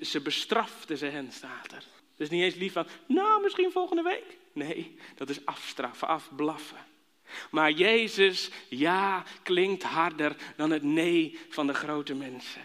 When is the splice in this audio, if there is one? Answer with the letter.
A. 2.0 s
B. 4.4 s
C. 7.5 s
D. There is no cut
A